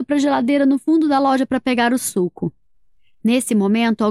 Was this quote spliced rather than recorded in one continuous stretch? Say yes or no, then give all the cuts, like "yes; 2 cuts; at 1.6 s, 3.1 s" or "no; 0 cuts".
no; 0 cuts